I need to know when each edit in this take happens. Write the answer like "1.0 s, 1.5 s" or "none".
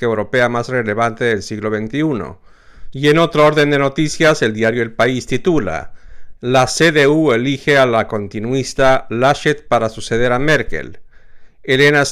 2.9 s